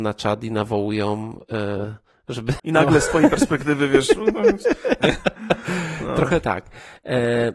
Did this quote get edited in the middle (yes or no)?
yes